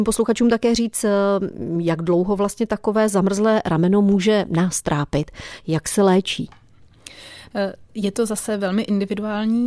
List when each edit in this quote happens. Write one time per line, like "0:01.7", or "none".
none